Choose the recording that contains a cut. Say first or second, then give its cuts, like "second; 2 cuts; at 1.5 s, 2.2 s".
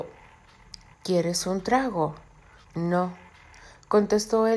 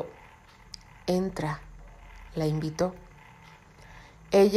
first; 2 cuts; at 0.9 s, 2.6 s